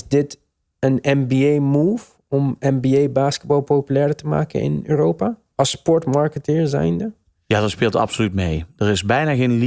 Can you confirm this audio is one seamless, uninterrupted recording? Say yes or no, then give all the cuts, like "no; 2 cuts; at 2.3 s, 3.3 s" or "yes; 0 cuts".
yes; 0 cuts